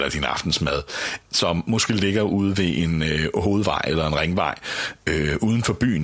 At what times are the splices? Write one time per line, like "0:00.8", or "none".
0:01.2